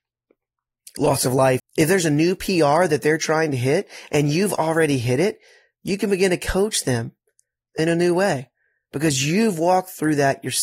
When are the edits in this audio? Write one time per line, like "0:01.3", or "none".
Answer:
0:01.6